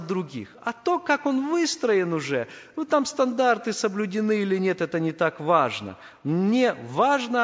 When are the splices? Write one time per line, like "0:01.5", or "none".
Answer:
none